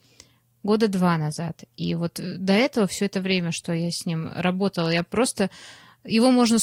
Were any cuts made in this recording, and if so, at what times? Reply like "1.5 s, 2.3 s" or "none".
none